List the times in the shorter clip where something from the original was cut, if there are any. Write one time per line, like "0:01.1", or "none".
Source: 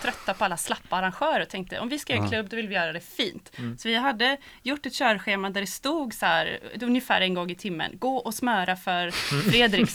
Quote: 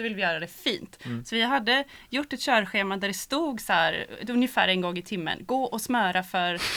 none